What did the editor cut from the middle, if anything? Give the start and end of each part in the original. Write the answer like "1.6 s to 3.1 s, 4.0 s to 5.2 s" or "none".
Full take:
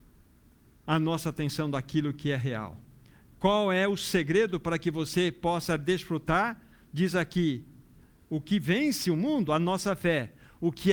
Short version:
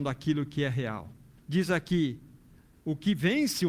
3.0 s to 6.8 s